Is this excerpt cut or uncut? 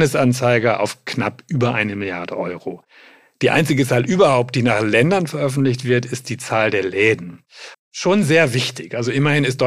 cut